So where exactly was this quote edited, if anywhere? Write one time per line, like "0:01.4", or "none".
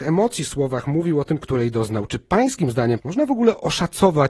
0:01.4
0:03.0